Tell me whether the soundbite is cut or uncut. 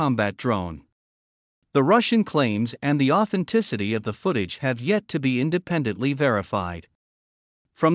uncut